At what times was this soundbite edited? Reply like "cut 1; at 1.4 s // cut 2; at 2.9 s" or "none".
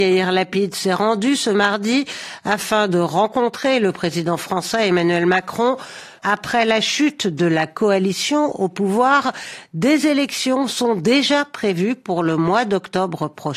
cut 1; at 6.2 s

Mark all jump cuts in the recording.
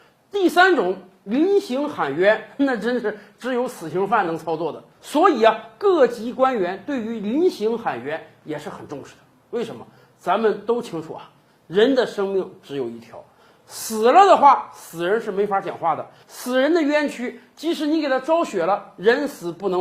none

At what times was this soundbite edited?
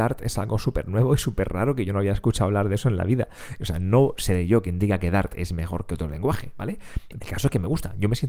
cut 1; at 7.2 s

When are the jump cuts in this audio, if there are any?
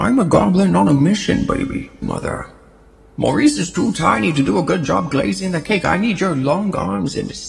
cut 1; at 2.0 s

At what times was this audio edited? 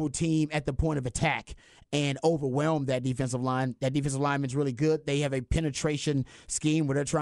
none

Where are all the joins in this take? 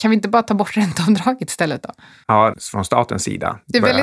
cut 1; at 2.5 s

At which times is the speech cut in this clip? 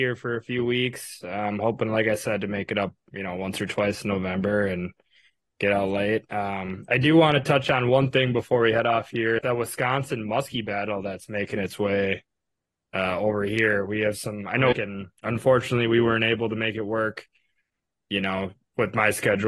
cut 1; at 9.4 s // cut 2; at 14.7 s

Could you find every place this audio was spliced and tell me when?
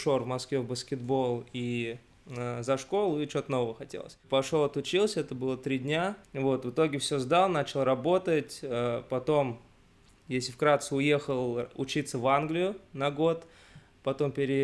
cut 1; at 6.2 s

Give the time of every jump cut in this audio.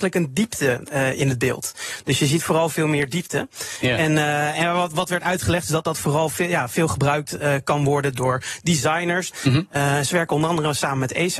cut 1; at 9.3 s

